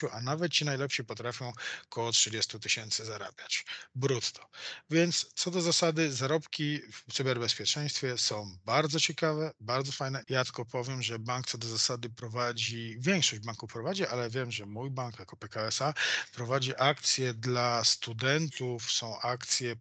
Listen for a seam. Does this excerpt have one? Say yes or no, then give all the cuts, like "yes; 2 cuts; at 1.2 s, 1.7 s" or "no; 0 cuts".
yes; 1 cut; at 10.2 s